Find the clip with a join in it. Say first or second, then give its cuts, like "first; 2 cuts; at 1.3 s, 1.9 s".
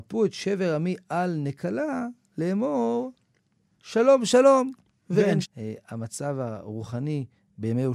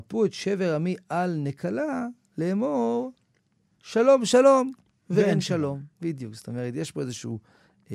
first; 1 cut; at 5.4 s